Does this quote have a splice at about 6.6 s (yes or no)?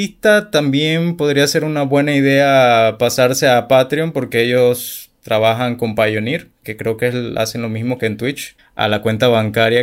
yes